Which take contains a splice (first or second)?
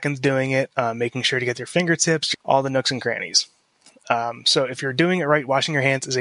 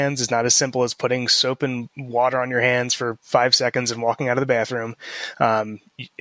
first